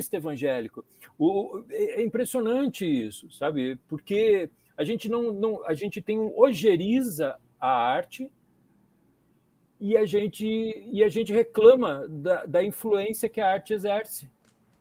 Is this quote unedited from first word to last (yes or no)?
yes